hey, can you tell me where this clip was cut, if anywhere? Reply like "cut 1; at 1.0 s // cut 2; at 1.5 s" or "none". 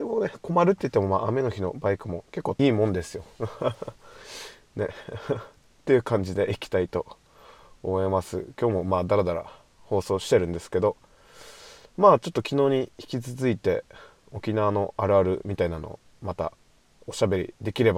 cut 1; at 2.6 s